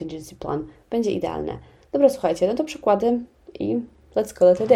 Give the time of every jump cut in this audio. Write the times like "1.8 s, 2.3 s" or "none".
none